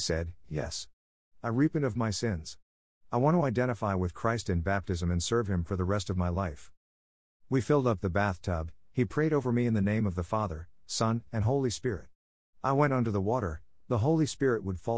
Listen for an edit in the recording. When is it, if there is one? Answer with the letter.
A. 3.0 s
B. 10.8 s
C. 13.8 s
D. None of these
C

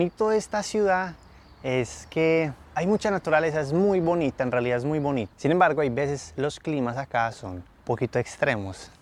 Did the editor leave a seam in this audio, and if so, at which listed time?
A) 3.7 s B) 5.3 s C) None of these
B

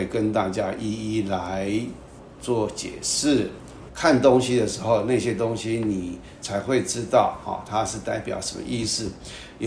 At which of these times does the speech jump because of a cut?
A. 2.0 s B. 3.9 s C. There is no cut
B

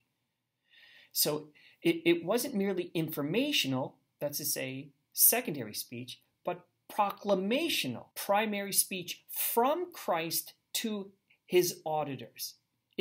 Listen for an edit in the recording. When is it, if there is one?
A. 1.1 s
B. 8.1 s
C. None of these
B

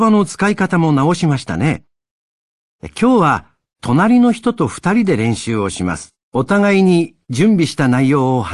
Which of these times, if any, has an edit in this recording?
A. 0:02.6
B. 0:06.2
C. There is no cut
B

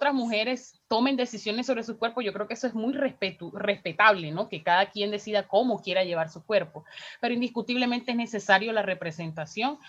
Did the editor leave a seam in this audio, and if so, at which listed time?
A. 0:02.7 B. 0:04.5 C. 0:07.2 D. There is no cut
D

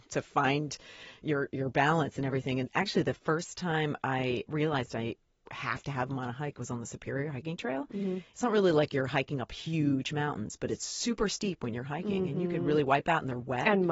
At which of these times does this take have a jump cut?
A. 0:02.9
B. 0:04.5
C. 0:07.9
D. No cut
B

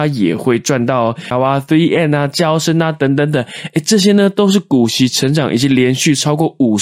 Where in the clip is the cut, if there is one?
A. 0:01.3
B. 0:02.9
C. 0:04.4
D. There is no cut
A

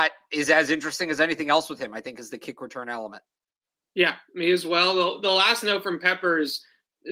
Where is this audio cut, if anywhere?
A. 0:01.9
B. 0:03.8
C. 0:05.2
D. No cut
D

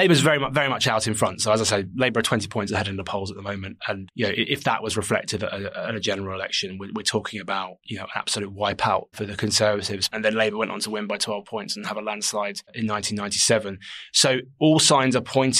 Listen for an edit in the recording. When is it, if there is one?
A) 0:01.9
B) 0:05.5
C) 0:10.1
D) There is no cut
C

